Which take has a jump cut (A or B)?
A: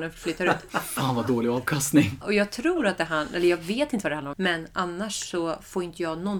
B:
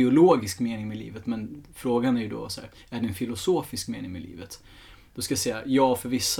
A